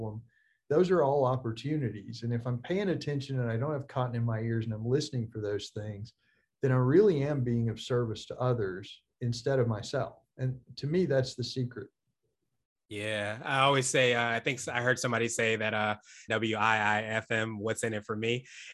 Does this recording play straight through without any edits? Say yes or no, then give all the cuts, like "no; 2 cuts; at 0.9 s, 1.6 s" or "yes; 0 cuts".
no; 1 cut; at 16.3 s